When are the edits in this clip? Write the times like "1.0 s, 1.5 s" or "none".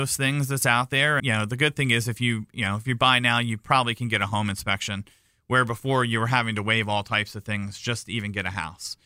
1.2 s